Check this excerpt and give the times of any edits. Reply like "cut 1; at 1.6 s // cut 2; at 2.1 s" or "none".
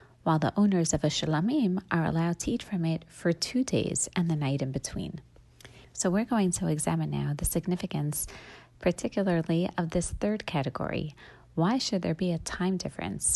cut 1; at 5.8 s

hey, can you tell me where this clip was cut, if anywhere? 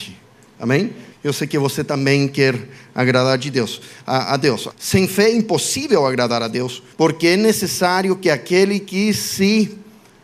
cut 1; at 1.1 s // cut 2; at 4.7 s // cut 3; at 6.9 s

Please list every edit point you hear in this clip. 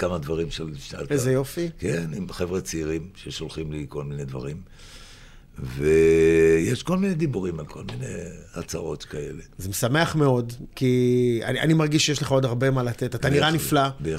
none

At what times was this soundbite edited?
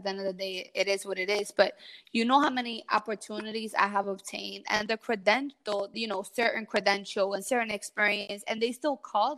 cut 1; at 5.9 s

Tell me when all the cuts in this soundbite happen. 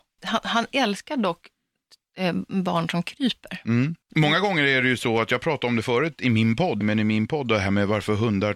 cut 1; at 4.0 s // cut 2; at 6.8 s

